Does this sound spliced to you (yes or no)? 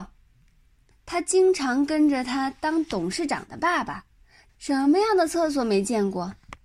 yes